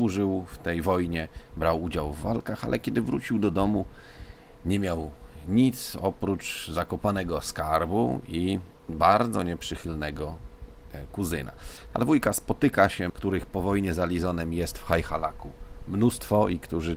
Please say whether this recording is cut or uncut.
cut